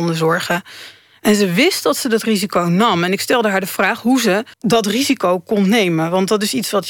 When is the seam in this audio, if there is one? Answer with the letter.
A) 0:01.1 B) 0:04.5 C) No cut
B